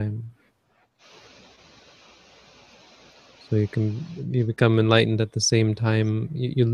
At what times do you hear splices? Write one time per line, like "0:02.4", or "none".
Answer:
none